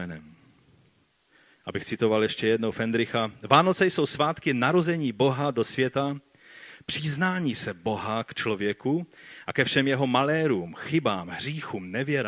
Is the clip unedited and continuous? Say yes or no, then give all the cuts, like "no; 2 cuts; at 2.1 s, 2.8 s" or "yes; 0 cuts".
yes; 0 cuts